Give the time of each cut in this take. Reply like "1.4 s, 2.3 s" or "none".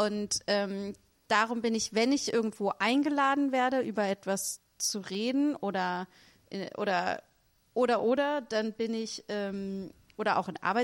8.0 s